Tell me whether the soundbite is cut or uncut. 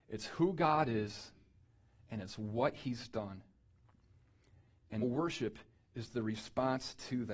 cut